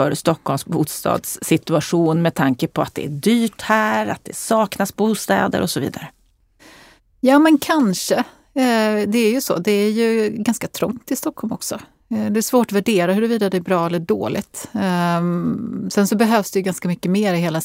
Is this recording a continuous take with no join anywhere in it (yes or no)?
yes